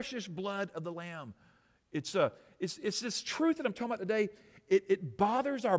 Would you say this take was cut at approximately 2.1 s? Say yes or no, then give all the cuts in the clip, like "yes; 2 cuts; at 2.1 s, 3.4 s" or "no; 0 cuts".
no; 0 cuts